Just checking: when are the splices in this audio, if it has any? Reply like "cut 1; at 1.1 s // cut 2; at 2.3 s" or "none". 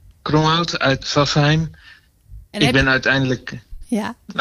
cut 1; at 1.0 s // cut 2; at 2.5 s